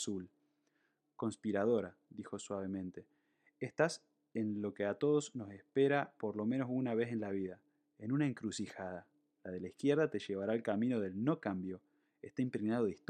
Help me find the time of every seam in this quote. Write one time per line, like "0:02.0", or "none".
0:09.3